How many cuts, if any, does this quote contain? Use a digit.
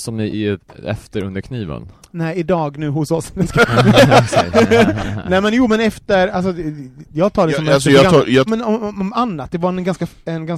1